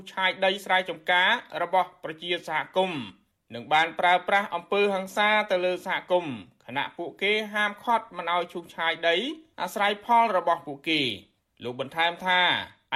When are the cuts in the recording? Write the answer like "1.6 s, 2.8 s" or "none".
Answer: none